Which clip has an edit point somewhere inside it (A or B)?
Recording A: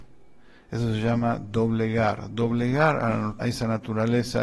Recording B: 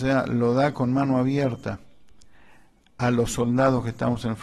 A